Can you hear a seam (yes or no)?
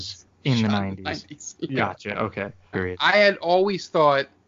yes